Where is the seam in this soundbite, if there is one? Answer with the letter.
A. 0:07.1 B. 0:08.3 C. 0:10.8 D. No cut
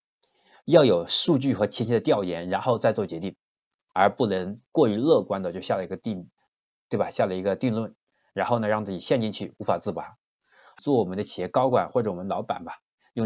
C